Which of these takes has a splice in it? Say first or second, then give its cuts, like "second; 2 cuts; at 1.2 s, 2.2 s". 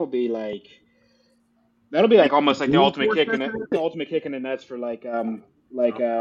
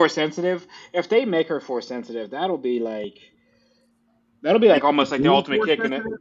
first; 1 cut; at 3.7 s